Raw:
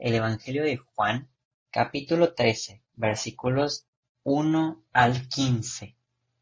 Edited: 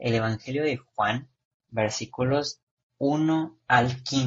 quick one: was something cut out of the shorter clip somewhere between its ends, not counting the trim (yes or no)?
yes